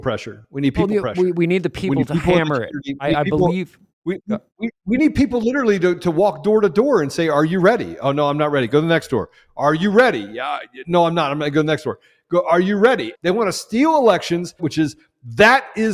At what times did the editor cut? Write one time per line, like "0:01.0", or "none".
0:13.1
0:14.6